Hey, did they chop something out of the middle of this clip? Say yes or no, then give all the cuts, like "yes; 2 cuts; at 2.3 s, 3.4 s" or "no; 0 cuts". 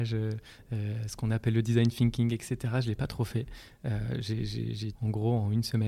yes; 1 cut; at 4.9 s